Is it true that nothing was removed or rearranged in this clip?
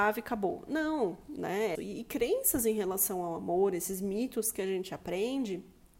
no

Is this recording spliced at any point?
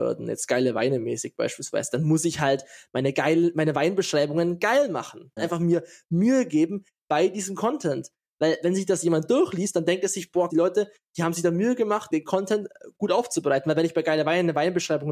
yes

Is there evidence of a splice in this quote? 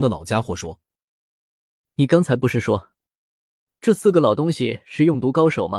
no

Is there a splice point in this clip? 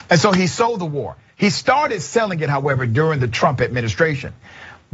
no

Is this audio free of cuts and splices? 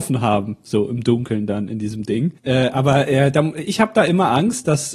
no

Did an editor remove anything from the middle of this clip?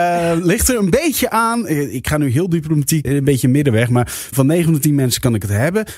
yes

